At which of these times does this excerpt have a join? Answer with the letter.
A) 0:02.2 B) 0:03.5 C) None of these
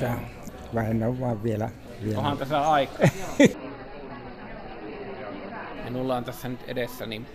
B